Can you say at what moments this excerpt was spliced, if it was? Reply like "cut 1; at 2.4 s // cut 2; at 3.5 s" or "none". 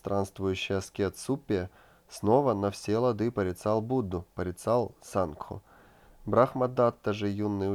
cut 1; at 4.3 s